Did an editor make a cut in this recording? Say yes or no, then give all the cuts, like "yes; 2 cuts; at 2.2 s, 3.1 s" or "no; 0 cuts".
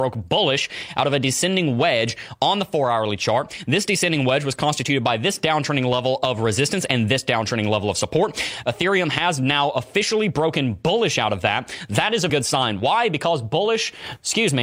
yes; 1 cut; at 12.3 s